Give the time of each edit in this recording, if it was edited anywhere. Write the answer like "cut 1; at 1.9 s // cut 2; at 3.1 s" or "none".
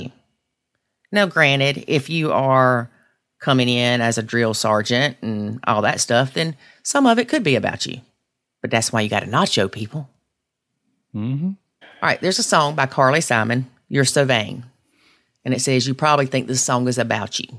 cut 1; at 11.8 s